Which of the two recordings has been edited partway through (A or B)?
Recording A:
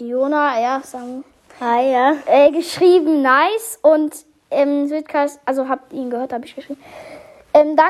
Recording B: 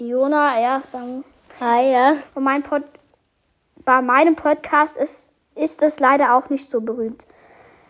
B